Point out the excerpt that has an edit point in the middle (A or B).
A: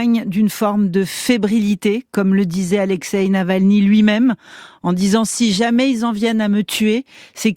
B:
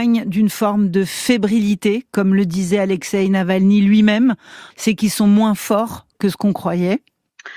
B